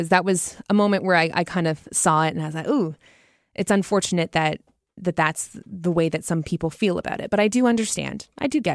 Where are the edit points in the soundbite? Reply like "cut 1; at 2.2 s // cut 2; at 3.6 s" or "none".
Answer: none